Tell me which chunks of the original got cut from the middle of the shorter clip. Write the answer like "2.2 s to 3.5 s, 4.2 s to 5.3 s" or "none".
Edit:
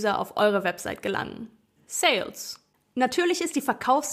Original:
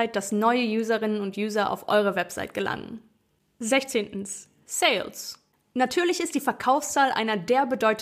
3.3 s to 4.5 s